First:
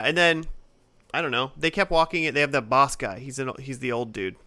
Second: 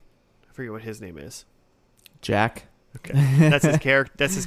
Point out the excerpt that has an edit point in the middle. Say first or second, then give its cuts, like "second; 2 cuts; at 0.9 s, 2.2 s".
second; 1 cut; at 2.9 s